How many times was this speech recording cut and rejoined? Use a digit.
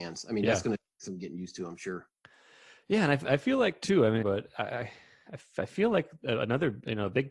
1